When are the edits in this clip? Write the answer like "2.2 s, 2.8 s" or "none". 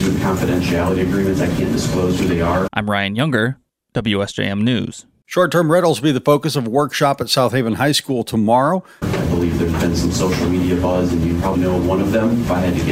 2.7 s, 9.0 s, 11.5 s